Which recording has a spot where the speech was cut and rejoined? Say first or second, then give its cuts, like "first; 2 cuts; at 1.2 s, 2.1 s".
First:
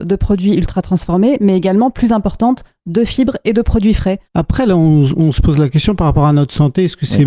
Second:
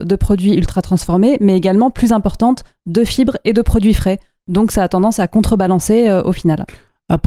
first; 1 cut; at 4.3 s